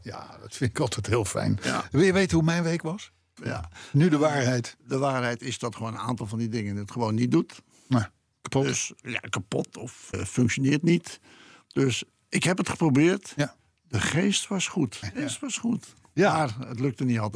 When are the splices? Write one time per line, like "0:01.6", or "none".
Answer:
0:03.4
0:10.1
0:15.0

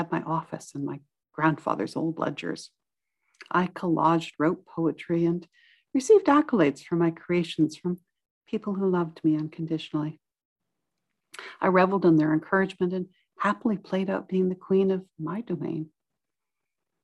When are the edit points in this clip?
none

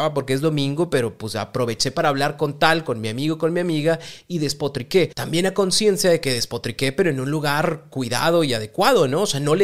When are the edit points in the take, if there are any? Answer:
none

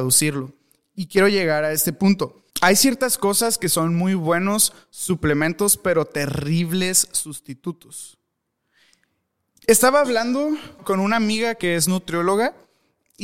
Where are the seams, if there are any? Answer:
0:02.5
0:10.8

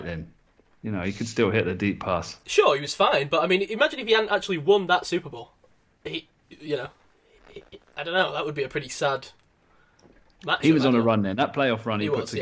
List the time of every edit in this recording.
none

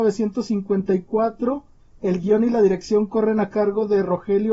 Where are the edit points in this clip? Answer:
none

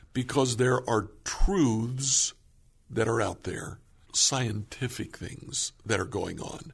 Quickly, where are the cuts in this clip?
0:04.0

